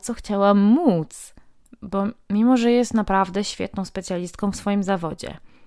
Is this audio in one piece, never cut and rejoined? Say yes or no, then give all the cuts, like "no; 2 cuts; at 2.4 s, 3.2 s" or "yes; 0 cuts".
no; 1 cut; at 1.6 s